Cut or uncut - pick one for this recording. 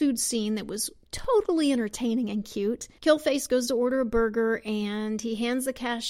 uncut